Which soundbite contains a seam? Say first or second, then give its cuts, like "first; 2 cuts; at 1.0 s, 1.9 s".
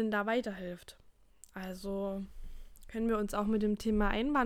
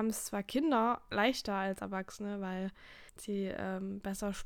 second; 1 cut; at 3.1 s